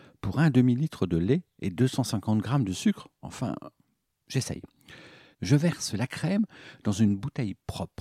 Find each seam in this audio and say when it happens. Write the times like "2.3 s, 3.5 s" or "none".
5.3 s